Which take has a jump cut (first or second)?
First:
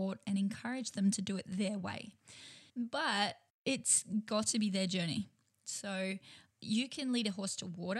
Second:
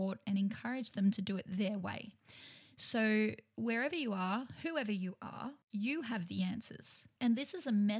first